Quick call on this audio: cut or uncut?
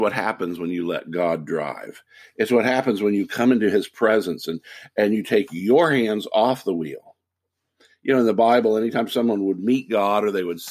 uncut